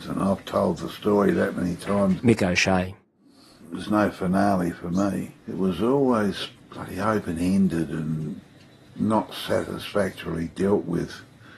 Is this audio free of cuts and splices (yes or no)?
no